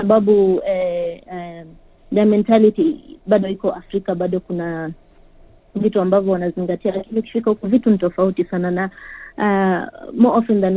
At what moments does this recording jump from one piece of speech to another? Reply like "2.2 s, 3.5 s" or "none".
none